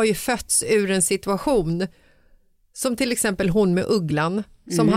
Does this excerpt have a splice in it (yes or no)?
no